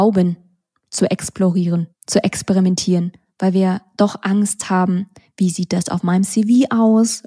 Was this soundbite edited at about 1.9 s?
yes; 1 cut; at 1.9 s

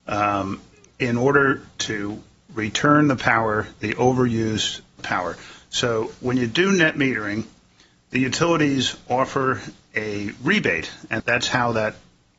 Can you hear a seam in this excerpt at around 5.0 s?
yes; 2 cuts; at 5.0 s, 11.2 s

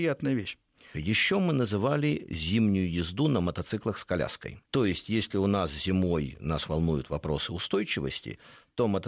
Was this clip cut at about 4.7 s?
yes; 2 cuts; at 0.9 s, 4.7 s

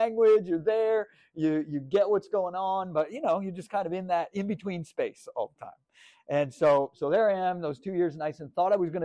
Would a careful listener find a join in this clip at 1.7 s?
no; 0 cuts

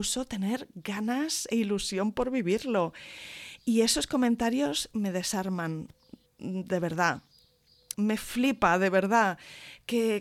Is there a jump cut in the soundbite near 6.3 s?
yes; 2 cuts; at 6.3 s, 7.9 s

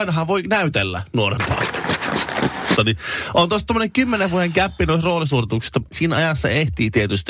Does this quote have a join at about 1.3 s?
no; 2 cuts; at 2.8 s, 5.9 s

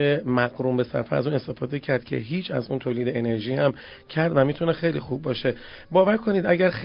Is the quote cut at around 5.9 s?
no; 0 cuts

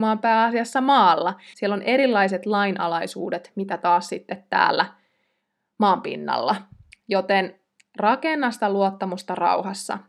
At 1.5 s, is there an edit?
yes; 1 cut; at 1.5 s

